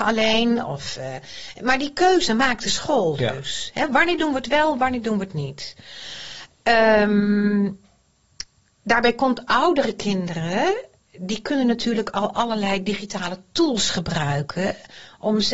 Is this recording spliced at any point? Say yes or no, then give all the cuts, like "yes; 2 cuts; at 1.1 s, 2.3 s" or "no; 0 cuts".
no; 0 cuts